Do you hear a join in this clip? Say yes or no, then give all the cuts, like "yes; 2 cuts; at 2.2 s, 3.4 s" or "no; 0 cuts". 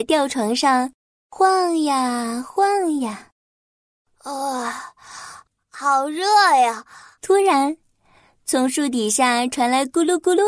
yes; 1 cut; at 7.2 s